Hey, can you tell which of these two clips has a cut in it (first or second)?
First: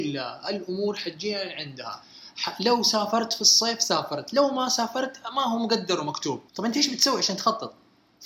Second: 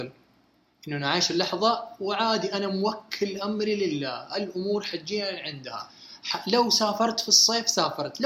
first